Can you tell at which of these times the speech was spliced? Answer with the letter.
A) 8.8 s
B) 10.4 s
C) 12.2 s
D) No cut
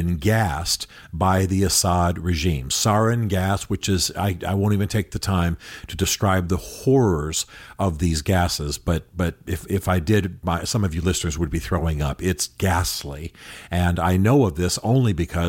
B